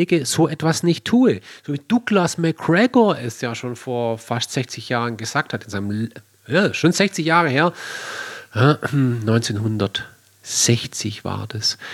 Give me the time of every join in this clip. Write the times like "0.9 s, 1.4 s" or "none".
none